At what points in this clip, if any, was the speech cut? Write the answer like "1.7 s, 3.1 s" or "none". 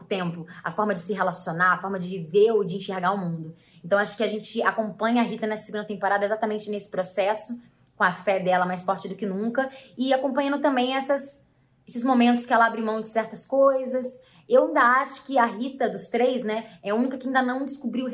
none